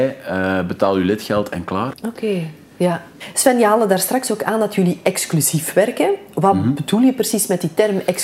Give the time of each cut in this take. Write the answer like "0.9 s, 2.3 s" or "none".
1.9 s